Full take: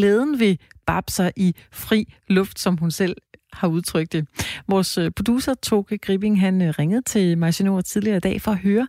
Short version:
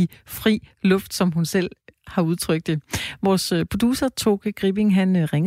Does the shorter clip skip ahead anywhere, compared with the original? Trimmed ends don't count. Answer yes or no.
no